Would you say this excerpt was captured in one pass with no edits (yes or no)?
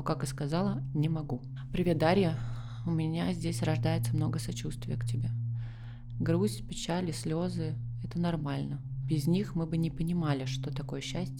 yes